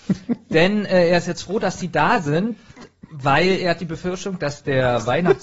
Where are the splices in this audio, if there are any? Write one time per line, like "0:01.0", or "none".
none